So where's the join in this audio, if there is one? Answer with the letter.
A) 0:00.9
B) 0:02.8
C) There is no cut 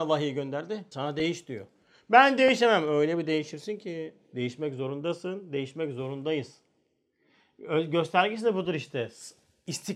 A